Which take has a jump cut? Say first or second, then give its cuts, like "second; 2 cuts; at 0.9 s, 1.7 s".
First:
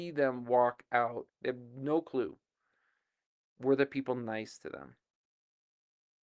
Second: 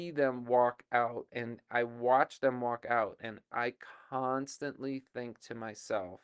first; 2 cuts; at 1.3 s, 3.5 s